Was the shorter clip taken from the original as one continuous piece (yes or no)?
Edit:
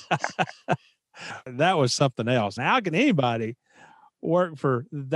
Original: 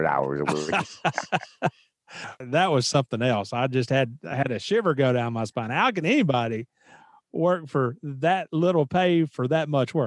no